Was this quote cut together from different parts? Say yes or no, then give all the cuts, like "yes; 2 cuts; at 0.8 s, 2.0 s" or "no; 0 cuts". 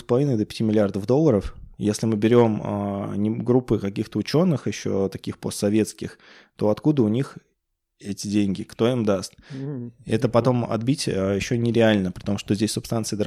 no; 0 cuts